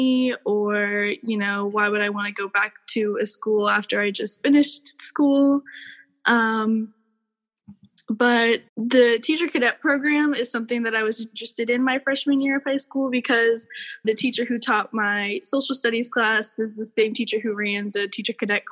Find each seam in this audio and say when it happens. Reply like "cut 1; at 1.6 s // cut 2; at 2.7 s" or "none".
cut 1; at 8.7 s // cut 2; at 14.0 s